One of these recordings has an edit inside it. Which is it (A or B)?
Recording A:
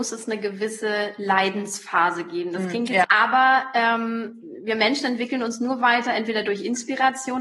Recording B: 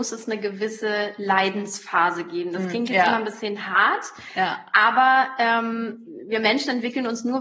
A